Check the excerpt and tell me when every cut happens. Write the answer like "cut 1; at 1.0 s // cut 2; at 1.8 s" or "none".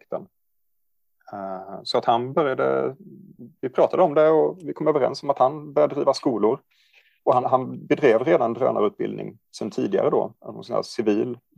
cut 1; at 7.4 s